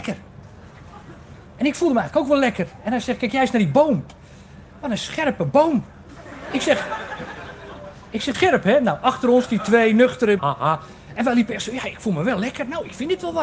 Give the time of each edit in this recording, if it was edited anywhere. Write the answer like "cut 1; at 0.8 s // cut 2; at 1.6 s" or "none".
cut 1; at 8.3 s // cut 2; at 10.4 s